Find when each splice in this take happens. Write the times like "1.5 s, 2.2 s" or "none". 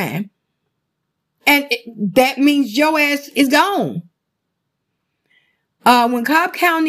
none